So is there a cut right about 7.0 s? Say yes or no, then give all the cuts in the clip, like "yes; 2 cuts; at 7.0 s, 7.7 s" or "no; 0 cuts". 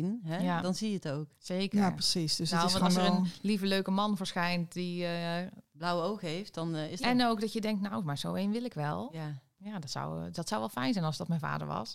yes; 1 cut; at 7.0 s